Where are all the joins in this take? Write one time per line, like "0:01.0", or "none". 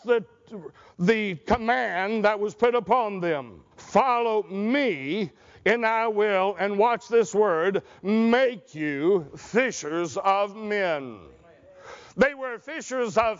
0:03.7